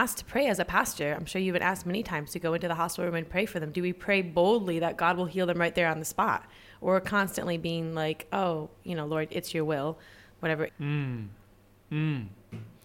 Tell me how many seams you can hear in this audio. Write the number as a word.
one